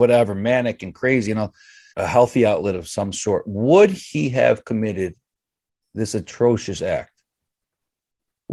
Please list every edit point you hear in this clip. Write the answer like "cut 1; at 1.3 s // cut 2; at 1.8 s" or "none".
cut 1; at 1.9 s

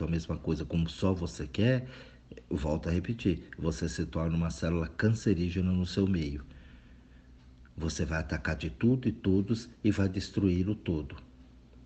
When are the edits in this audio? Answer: none

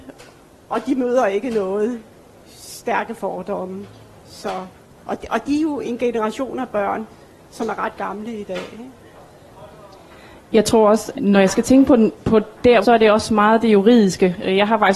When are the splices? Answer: cut 1; at 11.1 s // cut 2; at 12.8 s

